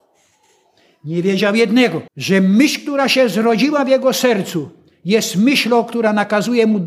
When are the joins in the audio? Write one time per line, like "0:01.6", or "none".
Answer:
0:02.1